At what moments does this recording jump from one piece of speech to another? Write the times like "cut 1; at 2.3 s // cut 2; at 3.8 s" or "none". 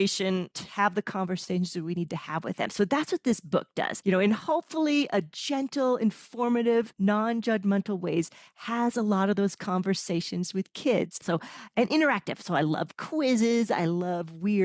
cut 1; at 11.2 s